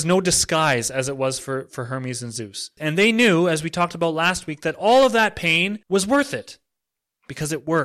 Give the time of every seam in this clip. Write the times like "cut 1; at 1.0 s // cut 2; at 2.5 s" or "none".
cut 1; at 2.8 s // cut 2; at 5.8 s